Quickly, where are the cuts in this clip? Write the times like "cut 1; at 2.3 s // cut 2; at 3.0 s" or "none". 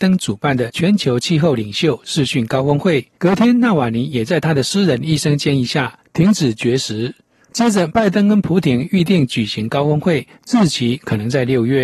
cut 1; at 3.1 s // cut 2; at 7.9 s